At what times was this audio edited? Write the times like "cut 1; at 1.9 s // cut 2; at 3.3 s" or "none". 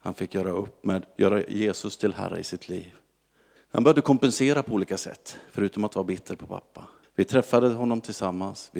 cut 1; at 3.6 s // cut 2; at 7.0 s